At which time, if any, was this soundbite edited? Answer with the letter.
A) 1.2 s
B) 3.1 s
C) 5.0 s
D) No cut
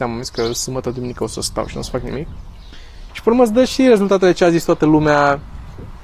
B